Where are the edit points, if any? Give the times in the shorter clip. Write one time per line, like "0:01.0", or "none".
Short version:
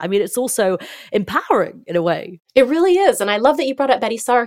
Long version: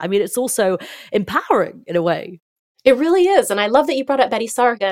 0:02.4